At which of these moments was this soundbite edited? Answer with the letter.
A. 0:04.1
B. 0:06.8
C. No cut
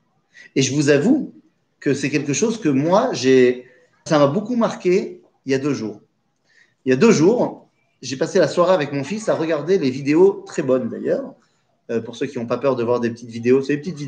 A